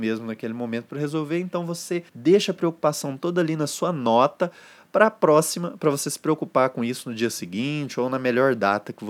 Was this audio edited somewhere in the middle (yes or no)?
yes